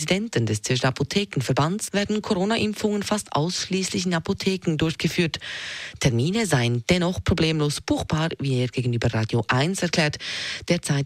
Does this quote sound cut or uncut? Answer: cut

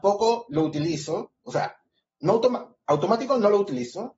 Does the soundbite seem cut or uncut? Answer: uncut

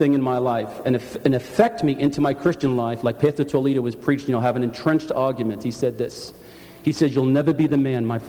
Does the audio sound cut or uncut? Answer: uncut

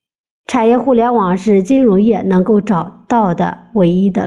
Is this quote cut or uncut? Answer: uncut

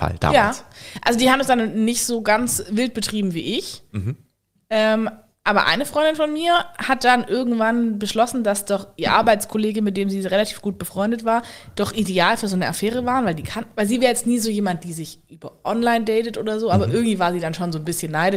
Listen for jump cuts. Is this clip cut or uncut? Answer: uncut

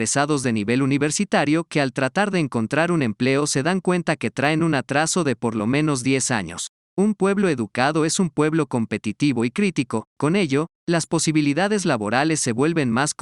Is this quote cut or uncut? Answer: cut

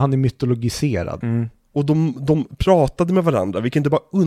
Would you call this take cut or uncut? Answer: cut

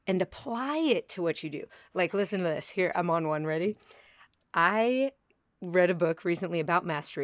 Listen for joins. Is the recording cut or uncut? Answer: uncut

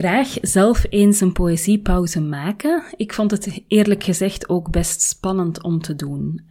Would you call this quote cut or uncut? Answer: uncut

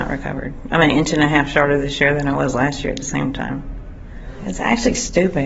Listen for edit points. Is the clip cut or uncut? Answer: uncut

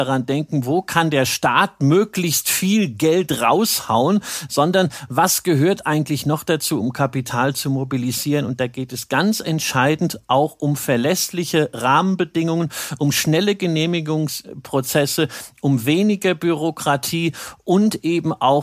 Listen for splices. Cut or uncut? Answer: uncut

